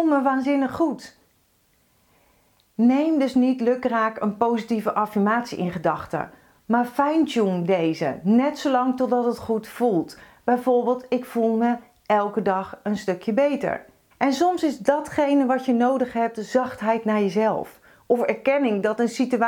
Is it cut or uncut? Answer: cut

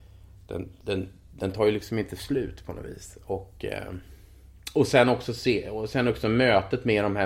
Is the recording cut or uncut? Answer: uncut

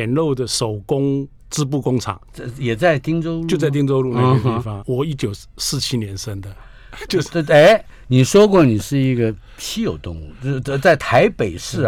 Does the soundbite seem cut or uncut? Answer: cut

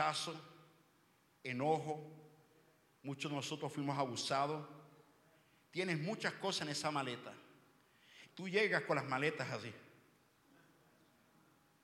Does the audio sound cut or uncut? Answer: cut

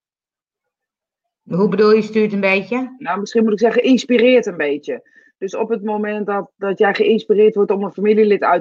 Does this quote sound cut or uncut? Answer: uncut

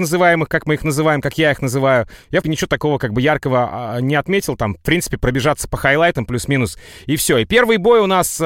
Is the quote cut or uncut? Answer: cut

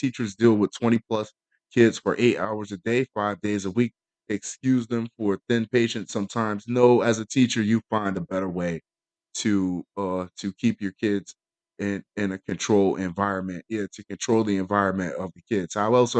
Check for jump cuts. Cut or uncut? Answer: uncut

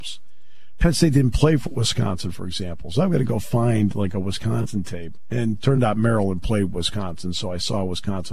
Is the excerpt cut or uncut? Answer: uncut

